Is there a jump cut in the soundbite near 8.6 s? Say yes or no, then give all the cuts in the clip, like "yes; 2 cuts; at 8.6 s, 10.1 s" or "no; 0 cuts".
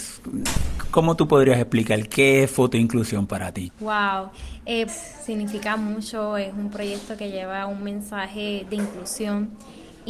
no; 2 cuts; at 3.7 s, 4.9 s